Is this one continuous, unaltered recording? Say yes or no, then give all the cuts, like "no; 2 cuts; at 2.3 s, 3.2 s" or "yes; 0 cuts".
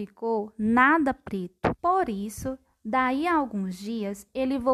no; 1 cut; at 1.8 s